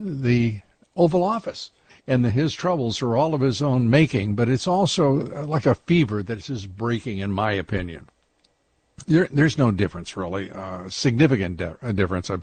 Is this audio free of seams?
no; 1 cut; at 1.9 s

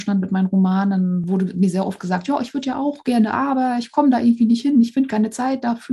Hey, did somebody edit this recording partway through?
no; 0 cuts

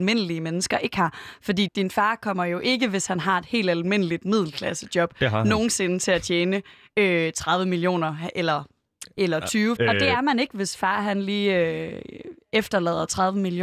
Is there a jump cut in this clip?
yes; 2 cuts; at 1.7 s, 9.8 s

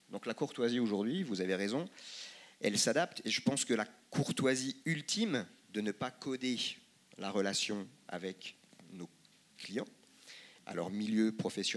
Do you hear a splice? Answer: yes; 2 cuts; at 5.6 s, 10.6 s

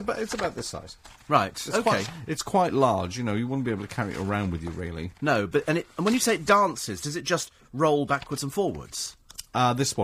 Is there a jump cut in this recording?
no; 0 cuts

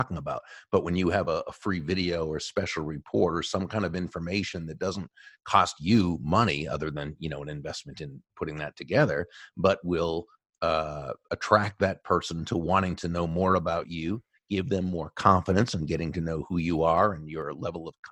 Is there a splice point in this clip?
no; 0 cuts

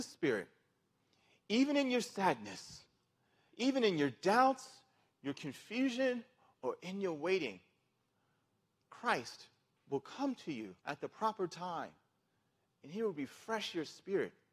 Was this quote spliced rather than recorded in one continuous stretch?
yes; 2 cuts; at 3.5 s, 10.8 s

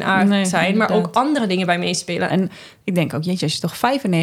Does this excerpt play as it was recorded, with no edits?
no; 1 cut; at 2.3 s

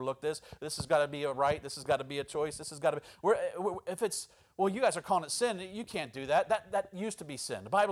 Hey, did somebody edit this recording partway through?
no; 0 cuts

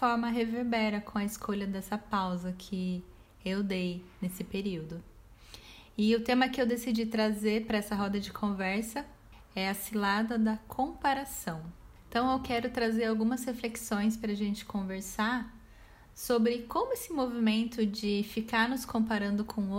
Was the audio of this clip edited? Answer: no; 0 cuts

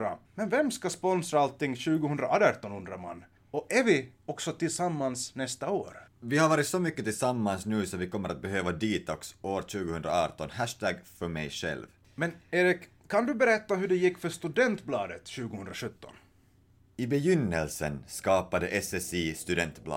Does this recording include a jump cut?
no; 0 cuts

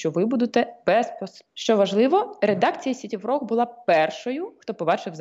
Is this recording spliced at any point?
yes; 1 cut; at 1.5 s

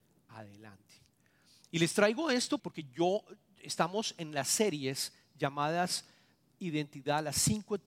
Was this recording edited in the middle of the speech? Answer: yes; 1 cut; at 2.6 s

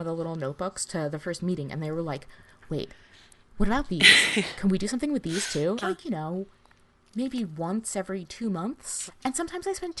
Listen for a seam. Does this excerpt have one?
yes; 2 cuts; at 5.8 s, 9.1 s

